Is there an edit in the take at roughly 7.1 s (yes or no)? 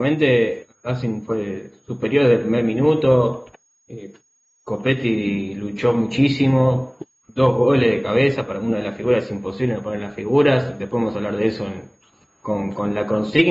no